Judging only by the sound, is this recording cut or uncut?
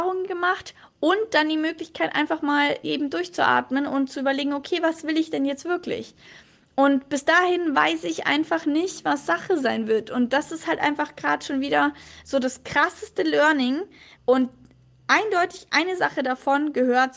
cut